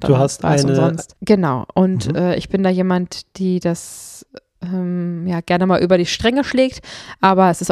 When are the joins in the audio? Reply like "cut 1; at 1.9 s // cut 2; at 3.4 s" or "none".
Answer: cut 1; at 1.2 s

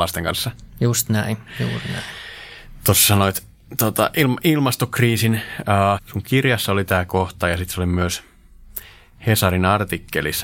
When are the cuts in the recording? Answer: cut 1; at 6.0 s

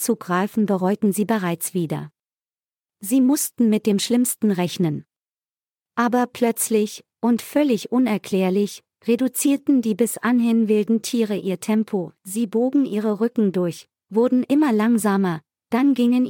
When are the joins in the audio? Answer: none

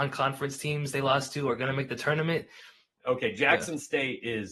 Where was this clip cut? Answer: cut 1; at 3.0 s

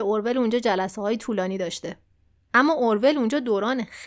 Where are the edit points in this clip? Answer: cut 1; at 2.4 s

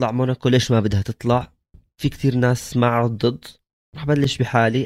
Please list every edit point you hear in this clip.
none

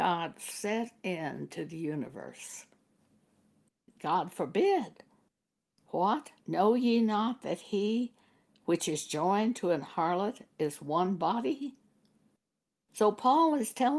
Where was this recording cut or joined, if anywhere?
cut 1; at 3.9 s // cut 2; at 6.4 s // cut 3; at 12.8 s

